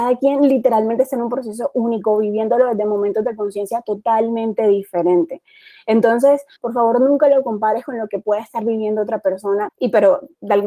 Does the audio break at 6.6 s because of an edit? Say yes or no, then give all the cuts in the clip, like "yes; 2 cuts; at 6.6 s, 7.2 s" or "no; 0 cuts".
yes; 2 cuts; at 6.6 s, 9.7 s